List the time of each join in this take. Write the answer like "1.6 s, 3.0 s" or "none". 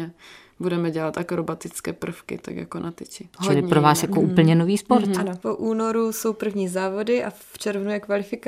5.4 s